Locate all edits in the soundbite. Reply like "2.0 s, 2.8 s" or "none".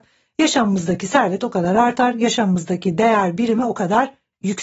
none